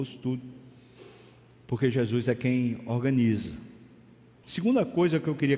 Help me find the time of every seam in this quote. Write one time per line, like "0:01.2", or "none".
0:04.4

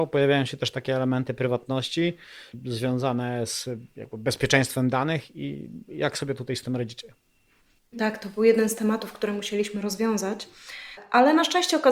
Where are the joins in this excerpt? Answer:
none

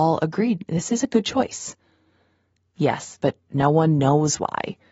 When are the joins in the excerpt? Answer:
0:03.2

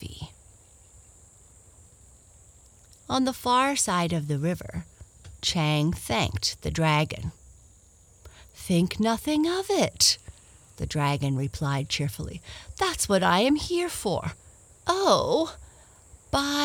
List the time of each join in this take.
none

